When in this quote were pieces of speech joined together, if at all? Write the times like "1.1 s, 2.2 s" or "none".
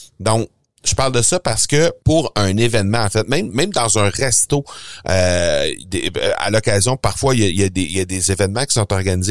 2.0 s